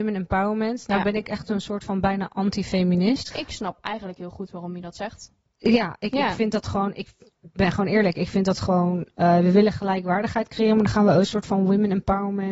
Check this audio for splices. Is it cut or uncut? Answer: cut